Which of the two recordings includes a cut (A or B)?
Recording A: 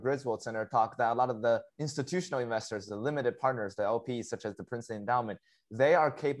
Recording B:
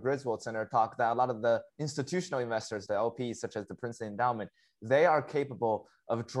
B